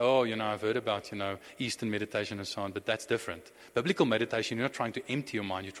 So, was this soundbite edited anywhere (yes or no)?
no